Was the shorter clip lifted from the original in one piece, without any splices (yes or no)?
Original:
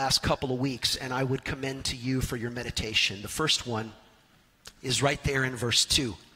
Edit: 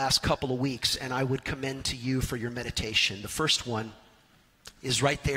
yes